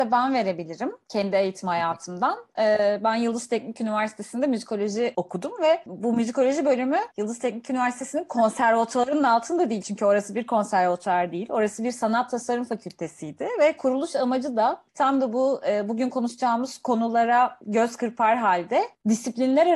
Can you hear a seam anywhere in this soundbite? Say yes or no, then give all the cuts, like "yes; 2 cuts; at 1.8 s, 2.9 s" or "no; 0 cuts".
no; 0 cuts